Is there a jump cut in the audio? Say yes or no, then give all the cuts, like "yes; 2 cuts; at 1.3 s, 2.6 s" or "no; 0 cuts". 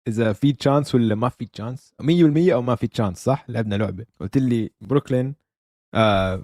yes; 1 cut; at 4.1 s